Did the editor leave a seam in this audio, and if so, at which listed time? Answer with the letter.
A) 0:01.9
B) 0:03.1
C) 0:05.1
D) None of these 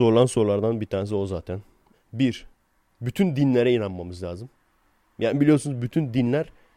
A